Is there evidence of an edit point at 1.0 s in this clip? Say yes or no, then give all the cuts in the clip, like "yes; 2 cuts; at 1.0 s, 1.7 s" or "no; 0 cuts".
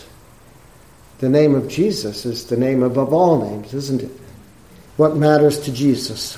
no; 1 cut; at 4.9 s